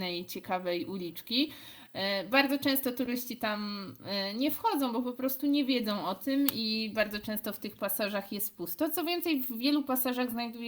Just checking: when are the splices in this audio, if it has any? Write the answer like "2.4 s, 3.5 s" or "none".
none